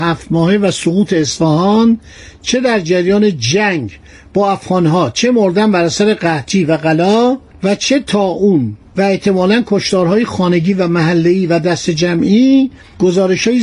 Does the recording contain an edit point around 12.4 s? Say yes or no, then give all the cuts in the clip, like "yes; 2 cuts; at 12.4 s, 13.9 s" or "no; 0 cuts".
no; 1 cut; at 8.9 s